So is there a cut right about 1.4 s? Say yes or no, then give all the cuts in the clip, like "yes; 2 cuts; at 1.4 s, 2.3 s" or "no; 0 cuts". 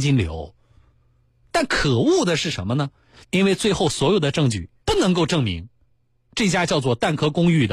no; 2 cuts; at 3.2 s, 4.8 s